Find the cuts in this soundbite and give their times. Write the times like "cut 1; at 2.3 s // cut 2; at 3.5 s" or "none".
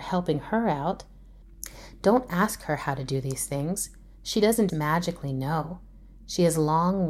cut 1; at 4.7 s